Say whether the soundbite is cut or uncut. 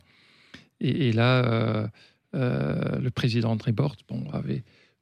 uncut